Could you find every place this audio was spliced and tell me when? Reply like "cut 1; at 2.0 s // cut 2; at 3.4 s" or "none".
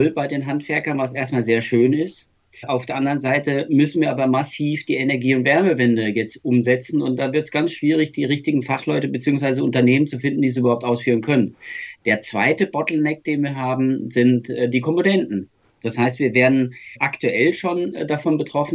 none